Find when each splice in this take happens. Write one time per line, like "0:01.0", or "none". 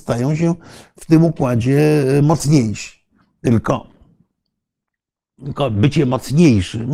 none